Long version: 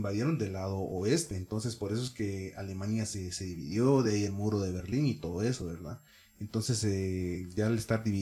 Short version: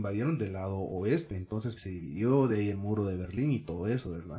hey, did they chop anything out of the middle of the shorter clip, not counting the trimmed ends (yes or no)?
yes